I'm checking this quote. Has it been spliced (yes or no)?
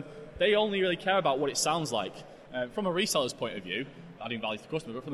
yes